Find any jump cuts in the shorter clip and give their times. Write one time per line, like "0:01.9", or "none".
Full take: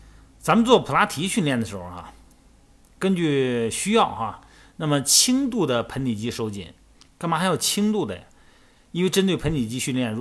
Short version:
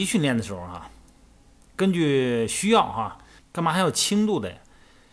0:03.4